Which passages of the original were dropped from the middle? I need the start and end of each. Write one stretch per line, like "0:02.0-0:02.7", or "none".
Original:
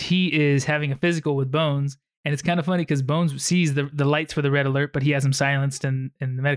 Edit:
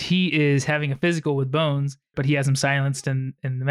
0:02.1-0:04.9